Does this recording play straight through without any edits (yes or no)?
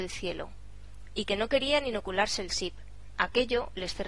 no